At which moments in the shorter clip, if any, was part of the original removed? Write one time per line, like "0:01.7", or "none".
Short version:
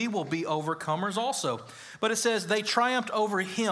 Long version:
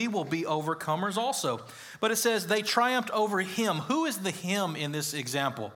none